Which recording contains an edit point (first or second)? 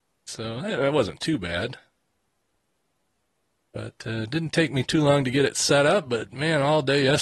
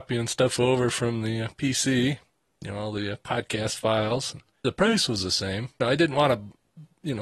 second